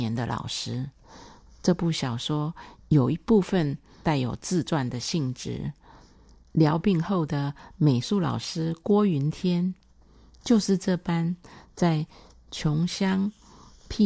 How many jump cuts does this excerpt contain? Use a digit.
2